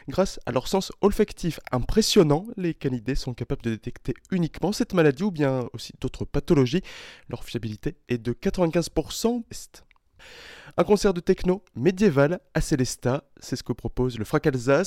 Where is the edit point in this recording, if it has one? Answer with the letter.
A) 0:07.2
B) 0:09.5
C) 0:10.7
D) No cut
B